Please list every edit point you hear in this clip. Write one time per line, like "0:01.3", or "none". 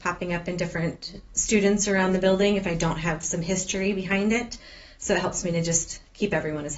none